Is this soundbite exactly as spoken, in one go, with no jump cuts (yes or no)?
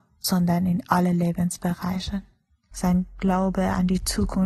no